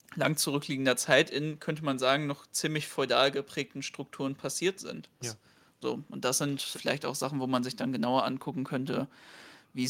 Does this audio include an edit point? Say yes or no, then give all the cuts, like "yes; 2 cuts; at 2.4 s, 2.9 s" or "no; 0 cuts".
yes; 2 cuts; at 5.2 s, 6.7 s